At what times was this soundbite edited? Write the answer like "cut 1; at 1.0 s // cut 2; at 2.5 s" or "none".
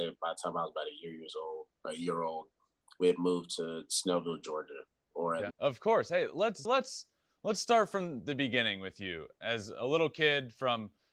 cut 1; at 5.5 s // cut 2; at 6.6 s